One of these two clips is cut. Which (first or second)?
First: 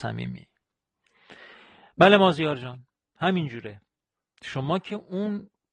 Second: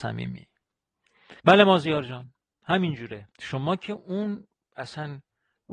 second